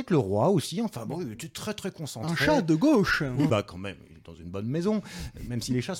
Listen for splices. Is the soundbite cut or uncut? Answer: cut